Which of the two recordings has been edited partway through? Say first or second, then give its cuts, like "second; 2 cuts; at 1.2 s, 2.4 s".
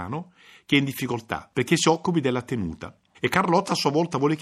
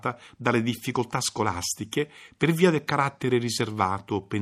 first; 2 cuts; at 1.5 s, 3.1 s